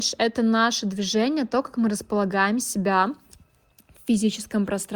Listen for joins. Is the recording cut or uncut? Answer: uncut